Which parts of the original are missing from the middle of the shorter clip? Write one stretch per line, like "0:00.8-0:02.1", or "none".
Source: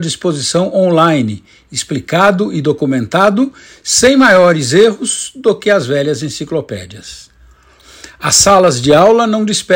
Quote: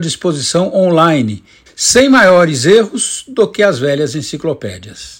0:01.7-0:03.7